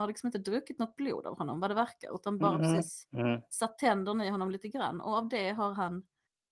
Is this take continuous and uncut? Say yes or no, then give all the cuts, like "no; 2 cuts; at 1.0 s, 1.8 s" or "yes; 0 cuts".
yes; 0 cuts